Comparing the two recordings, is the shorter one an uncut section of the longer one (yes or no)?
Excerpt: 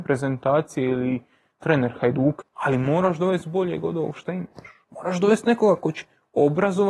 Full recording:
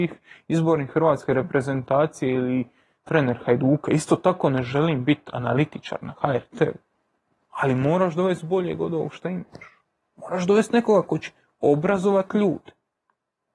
no